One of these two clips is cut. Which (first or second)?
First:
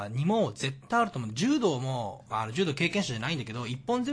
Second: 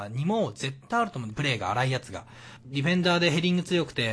second